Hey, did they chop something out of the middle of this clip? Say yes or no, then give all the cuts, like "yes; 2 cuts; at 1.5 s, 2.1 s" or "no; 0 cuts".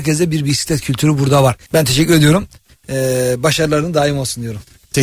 yes; 1 cut; at 1.7 s